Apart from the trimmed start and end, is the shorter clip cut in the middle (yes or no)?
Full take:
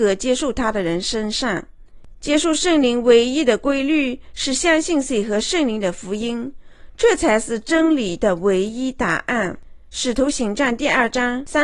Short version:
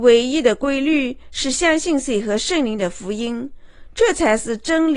no